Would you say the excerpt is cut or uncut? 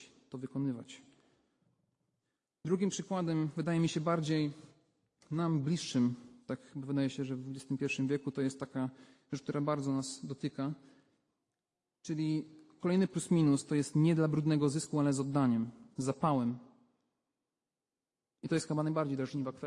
uncut